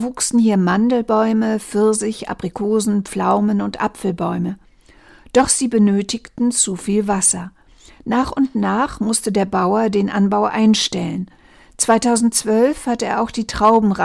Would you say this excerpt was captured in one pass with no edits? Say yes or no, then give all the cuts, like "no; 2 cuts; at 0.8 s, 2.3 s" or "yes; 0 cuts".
yes; 0 cuts